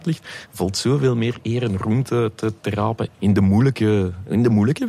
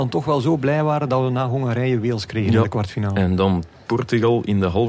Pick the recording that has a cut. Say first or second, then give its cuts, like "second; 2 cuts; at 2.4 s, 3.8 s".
first; 1 cut; at 3.1 s